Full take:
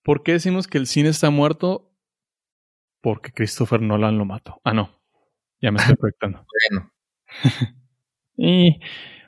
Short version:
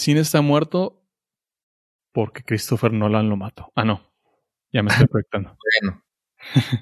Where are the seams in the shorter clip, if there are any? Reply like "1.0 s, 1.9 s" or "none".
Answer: none